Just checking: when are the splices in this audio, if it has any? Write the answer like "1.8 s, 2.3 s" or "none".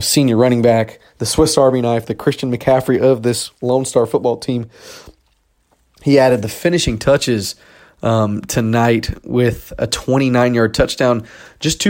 none